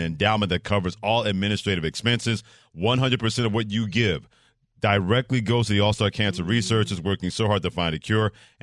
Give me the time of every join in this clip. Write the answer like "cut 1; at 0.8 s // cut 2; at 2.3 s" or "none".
none